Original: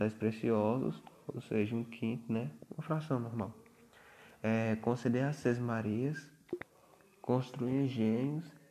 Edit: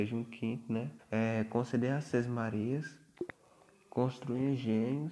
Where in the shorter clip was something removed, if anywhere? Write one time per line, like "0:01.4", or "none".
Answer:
0:01.0